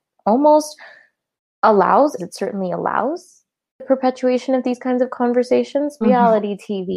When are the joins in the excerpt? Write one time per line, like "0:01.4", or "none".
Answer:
0:02.2
0:06.0